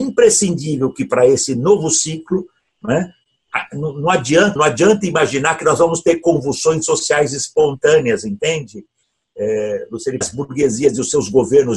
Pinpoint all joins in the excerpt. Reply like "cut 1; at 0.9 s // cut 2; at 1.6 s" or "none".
cut 1; at 4.6 s // cut 2; at 10.2 s